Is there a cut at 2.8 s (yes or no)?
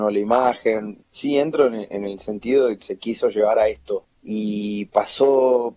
yes